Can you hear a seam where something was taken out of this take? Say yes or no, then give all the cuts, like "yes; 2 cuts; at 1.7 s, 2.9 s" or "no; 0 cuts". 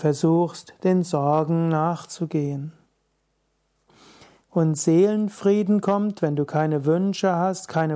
yes; 1 cut; at 4.4 s